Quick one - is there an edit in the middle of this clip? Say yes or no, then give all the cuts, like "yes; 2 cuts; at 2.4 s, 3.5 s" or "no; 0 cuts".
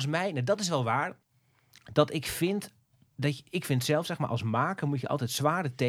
no; 0 cuts